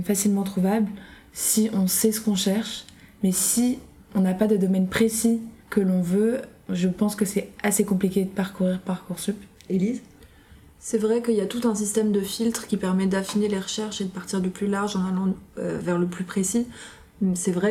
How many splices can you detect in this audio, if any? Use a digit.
1